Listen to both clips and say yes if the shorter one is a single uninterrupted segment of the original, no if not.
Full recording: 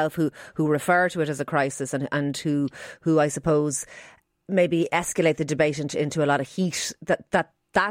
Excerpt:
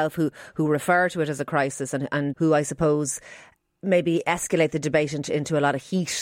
no